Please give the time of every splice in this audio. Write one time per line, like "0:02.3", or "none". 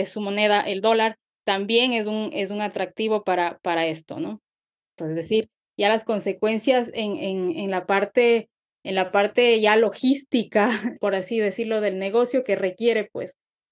0:05.0
0:11.0